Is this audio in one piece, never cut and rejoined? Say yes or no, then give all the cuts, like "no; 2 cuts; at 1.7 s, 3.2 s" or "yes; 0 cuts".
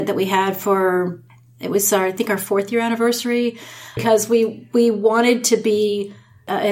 no; 1 cut; at 4.0 s